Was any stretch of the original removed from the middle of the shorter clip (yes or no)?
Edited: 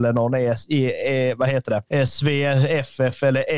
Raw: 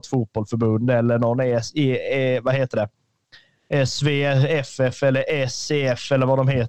yes